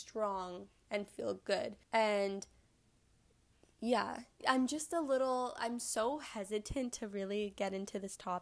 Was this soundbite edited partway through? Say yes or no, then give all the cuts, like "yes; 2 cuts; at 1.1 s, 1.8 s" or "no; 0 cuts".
yes; 2 cuts; at 1.8 s, 4.4 s